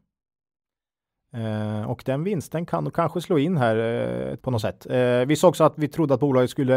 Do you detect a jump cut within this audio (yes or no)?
yes